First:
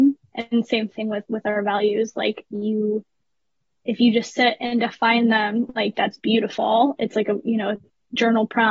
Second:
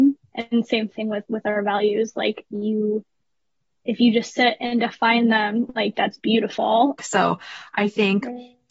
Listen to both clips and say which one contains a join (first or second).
second